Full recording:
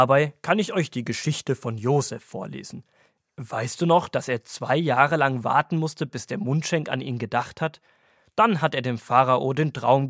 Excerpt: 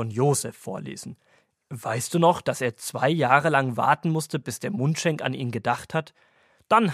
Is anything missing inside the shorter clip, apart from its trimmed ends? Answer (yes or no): no